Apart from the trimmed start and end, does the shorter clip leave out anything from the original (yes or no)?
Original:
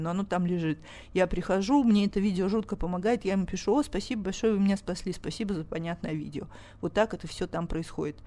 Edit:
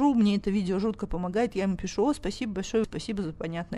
yes